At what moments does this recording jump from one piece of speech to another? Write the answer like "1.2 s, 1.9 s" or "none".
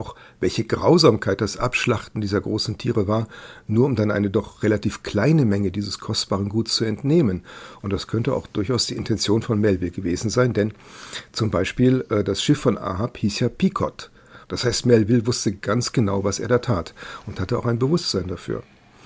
7.8 s, 14.4 s